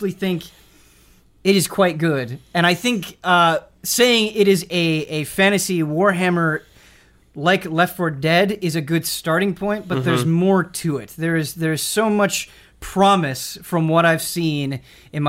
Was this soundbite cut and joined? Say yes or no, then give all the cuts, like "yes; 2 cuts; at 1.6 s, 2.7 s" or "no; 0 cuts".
no; 0 cuts